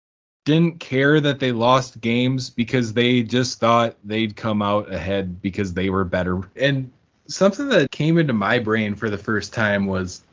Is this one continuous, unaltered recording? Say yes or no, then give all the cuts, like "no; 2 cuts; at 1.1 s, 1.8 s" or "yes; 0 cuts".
no; 2 cuts; at 6.6 s, 7.9 s